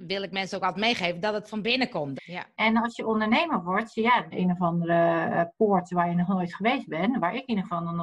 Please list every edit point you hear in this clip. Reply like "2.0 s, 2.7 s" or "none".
2.2 s, 4.3 s